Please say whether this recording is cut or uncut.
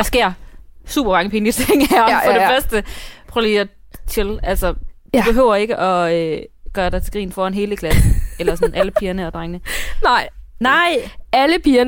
cut